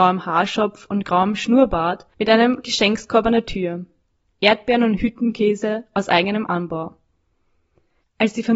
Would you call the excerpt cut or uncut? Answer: uncut